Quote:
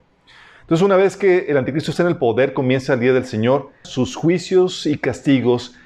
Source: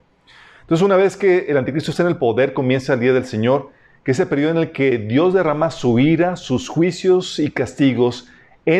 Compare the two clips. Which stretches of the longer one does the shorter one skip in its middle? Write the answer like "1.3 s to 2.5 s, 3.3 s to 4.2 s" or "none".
3.8 s to 6.4 s